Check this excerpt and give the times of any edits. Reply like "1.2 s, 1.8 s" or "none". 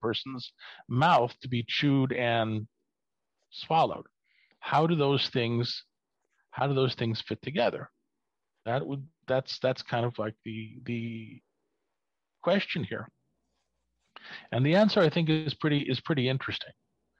none

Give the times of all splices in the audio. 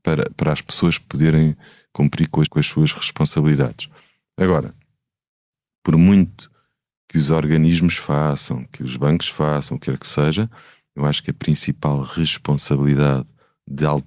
2.5 s

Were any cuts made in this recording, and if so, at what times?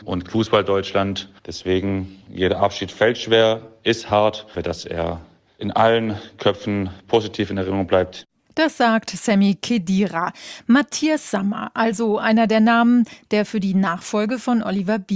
4.5 s

